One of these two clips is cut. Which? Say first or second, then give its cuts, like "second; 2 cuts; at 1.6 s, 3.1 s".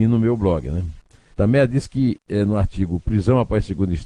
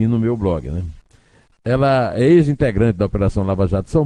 first; 1 cut; at 1.3 s